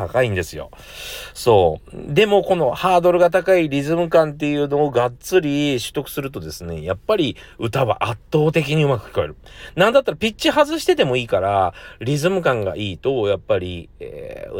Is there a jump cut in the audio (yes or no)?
no